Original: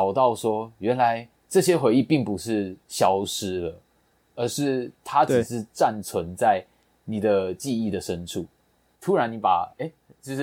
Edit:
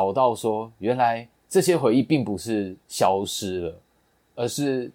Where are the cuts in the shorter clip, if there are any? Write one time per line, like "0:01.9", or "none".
none